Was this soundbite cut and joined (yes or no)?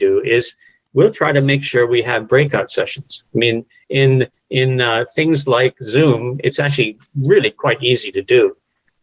no